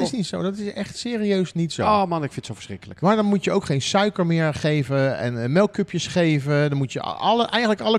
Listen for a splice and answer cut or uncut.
uncut